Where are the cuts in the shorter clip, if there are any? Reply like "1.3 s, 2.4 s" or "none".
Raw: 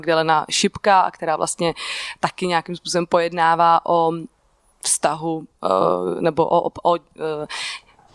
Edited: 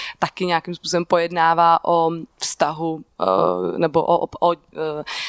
2.3 s